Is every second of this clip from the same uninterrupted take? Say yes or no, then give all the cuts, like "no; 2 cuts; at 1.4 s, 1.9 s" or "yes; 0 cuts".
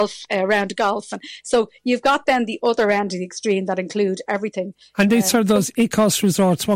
yes; 0 cuts